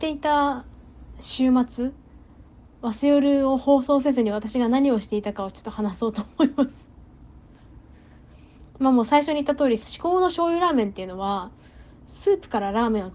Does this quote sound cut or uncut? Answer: cut